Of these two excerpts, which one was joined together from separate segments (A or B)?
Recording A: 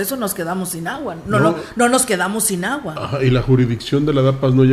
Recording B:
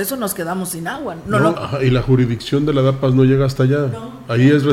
B